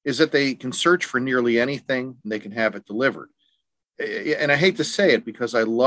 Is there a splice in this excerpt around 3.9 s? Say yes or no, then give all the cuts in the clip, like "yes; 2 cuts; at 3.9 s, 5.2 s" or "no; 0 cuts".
no; 1 cut; at 2.2 s